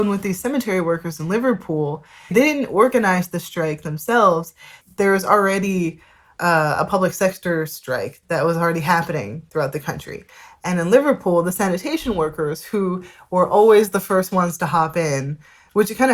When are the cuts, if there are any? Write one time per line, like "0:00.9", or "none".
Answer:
0:02.3

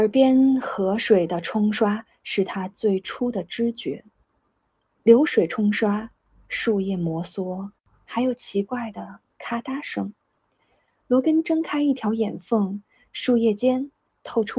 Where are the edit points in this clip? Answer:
none

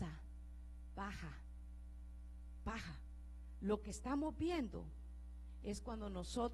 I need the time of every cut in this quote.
none

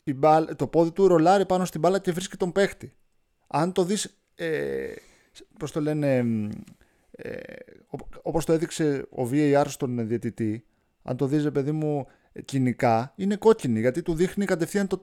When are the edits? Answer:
0:03.3

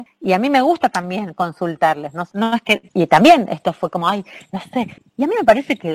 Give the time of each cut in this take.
0:02.3
0:05.0

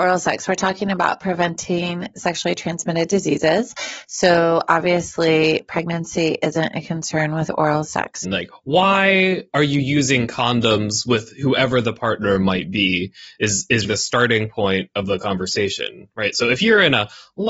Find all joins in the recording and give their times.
0:08.2
0:13.8

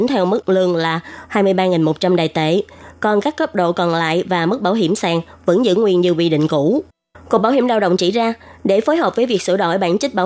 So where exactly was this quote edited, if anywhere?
none

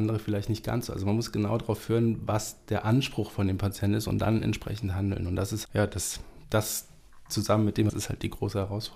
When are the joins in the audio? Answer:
0:05.7
0:07.9

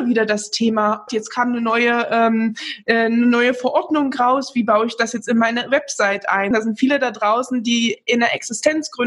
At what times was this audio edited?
0:01.1
0:06.5

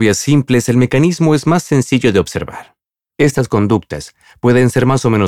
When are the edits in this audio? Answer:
0:03.0

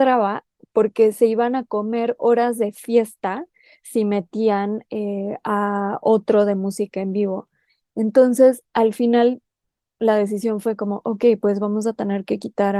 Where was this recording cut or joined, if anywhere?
none

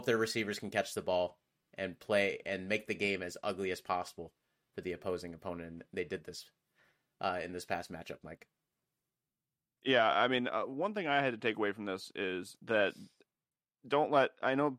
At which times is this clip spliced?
none

